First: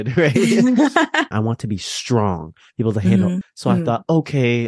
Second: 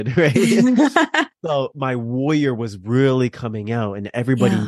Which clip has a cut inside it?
first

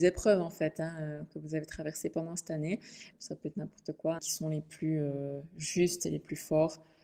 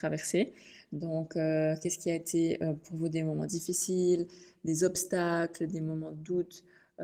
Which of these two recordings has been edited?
first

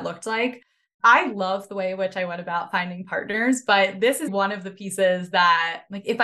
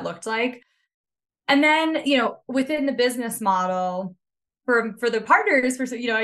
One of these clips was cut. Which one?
first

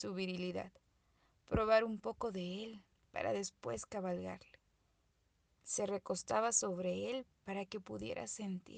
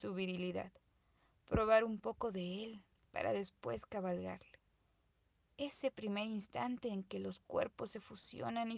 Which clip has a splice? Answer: first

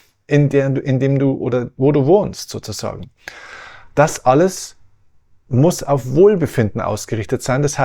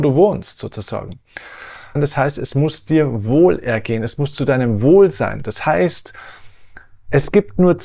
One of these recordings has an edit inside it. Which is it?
second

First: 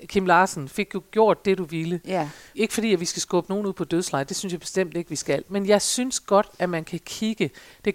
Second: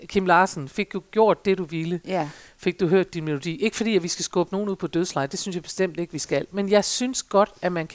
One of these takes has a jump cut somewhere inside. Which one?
first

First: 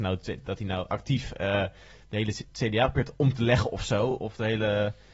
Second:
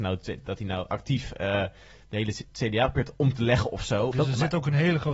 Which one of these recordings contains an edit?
second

